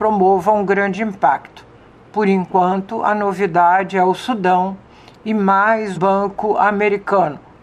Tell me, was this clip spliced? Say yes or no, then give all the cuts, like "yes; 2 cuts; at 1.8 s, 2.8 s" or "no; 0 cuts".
yes; 1 cut; at 5.9 s